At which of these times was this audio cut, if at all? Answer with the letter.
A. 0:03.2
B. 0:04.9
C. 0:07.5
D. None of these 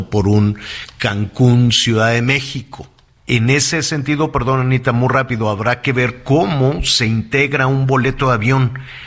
A